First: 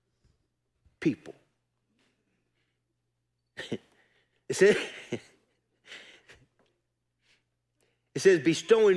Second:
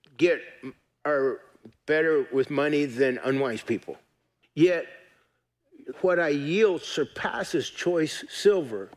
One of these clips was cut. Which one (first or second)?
second